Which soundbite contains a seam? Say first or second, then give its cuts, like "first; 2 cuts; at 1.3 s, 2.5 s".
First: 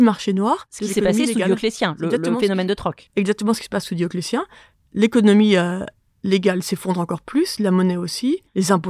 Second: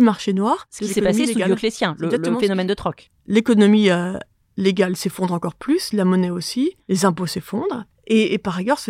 second; 1 cut; at 3.1 s